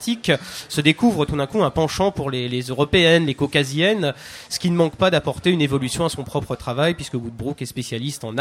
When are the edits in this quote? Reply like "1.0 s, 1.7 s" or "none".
none

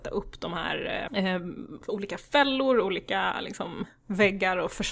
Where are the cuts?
1.1 s

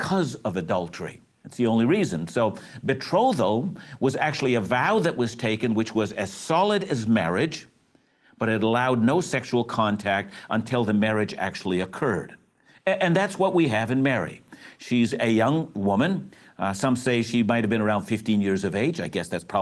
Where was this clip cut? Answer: none

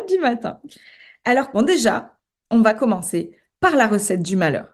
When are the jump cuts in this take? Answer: 1.5 s

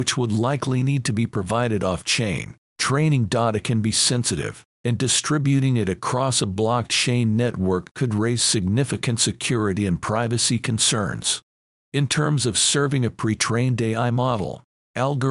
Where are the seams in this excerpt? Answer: 2.7 s

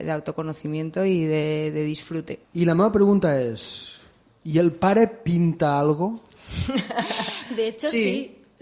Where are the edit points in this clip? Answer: 2.4 s

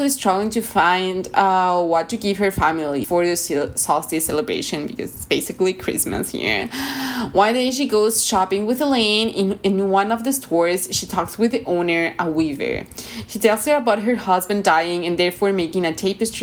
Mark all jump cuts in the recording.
3.0 s

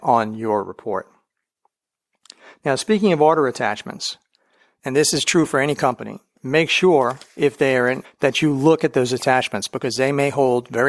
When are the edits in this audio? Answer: 6.4 s, 8.0 s

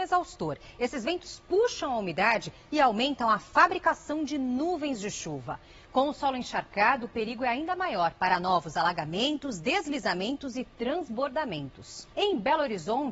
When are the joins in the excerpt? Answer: 12.1 s

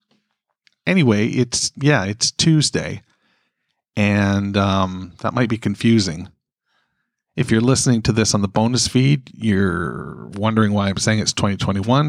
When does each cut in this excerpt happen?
none

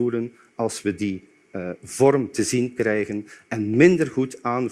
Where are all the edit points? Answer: none

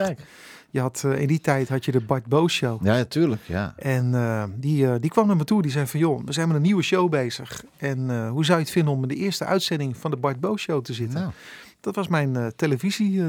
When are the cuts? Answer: none

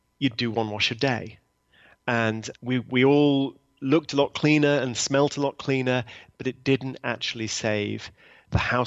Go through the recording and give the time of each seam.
2.5 s

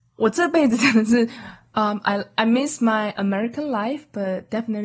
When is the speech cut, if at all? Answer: 2.3 s

